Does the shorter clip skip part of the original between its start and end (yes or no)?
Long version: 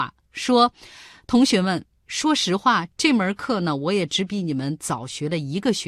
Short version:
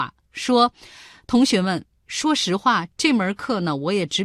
no